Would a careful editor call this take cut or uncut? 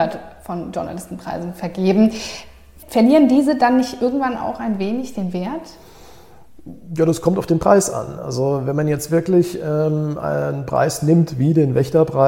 uncut